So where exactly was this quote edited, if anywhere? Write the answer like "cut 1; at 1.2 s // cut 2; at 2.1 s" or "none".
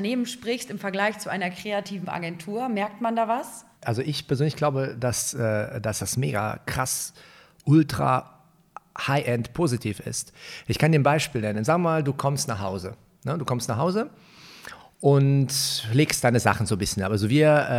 cut 1; at 3.7 s